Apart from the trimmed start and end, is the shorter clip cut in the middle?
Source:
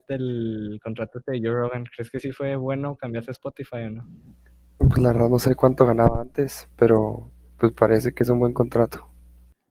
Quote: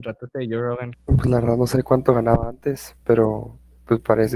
yes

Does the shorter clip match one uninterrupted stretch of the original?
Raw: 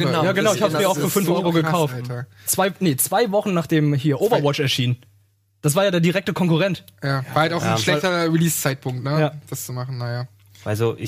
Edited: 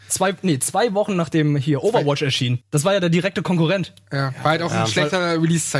no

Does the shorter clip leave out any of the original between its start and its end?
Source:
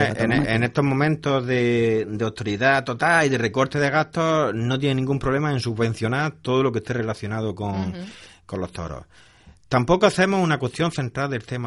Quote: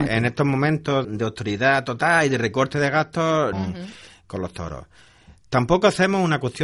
yes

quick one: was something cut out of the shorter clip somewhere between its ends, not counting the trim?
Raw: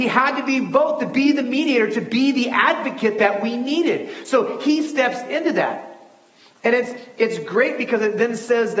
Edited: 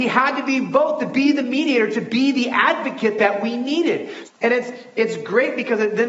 yes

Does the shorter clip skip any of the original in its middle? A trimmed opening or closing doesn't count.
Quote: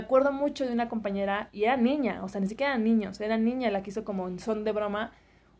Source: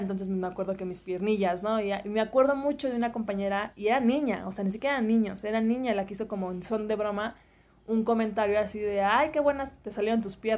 no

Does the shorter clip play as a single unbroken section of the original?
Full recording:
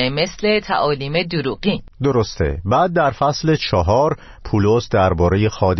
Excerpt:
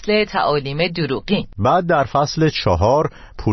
no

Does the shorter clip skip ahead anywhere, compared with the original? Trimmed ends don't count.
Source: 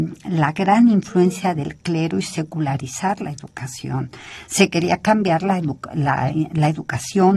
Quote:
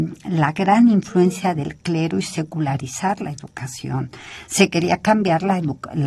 no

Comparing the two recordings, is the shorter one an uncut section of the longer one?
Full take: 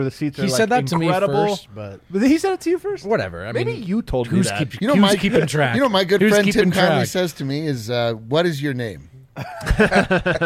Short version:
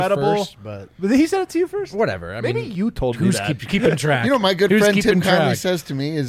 no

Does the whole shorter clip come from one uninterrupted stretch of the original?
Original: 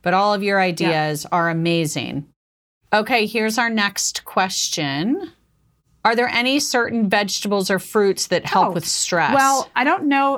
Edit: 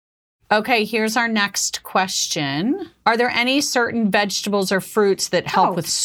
no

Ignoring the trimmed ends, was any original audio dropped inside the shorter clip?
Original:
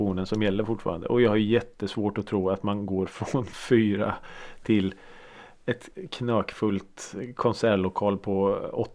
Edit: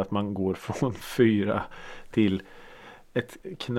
no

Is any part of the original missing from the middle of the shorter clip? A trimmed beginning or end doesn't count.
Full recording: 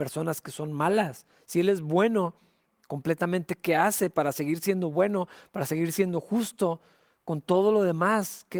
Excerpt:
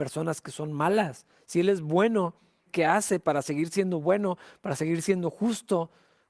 yes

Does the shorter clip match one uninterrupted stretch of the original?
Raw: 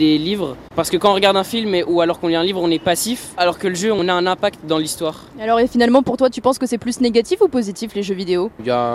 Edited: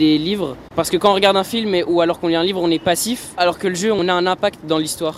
yes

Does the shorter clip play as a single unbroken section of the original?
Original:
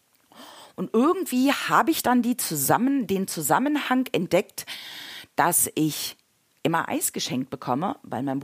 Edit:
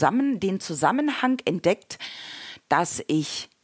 yes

